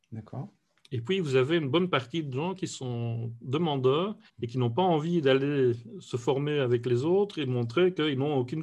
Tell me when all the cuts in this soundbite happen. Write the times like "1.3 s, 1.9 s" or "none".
4.3 s